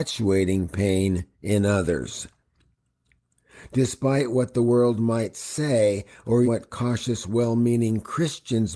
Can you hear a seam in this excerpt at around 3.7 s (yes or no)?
no